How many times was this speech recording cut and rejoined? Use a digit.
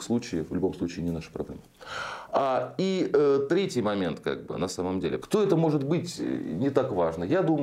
1